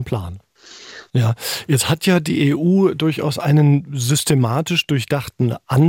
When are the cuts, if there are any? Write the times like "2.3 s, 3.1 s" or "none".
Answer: 1.1 s